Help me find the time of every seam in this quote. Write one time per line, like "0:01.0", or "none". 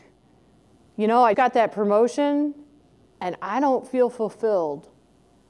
0:01.3